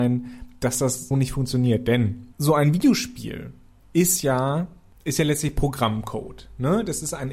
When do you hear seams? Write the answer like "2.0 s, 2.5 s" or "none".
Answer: 1.1 s, 2.3 s